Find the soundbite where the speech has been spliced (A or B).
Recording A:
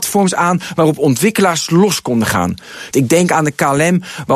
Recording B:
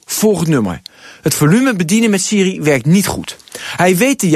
A